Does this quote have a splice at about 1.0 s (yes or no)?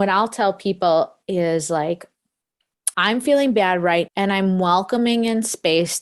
no